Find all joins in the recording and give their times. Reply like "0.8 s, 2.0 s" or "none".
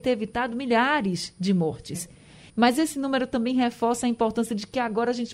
2.5 s